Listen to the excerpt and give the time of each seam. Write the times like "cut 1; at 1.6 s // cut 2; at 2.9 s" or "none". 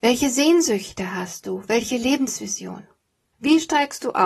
cut 1; at 3.3 s